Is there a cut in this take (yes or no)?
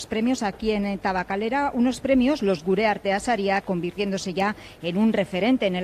yes